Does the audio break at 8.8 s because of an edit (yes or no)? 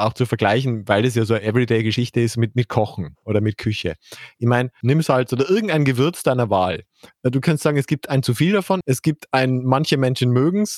yes